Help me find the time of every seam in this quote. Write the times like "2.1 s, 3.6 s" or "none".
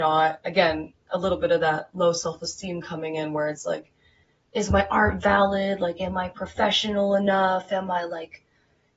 none